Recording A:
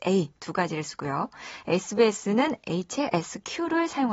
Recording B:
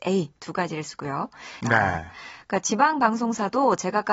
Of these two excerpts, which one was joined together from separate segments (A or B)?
B